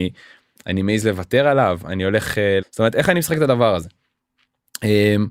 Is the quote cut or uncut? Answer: cut